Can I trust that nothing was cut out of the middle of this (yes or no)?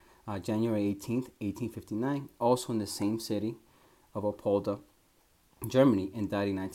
yes